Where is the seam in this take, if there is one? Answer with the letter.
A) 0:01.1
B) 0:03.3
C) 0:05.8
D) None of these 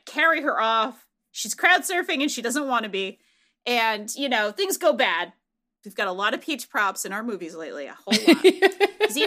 C